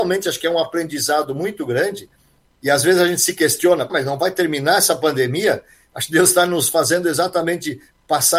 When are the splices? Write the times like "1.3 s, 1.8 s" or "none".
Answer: 3.9 s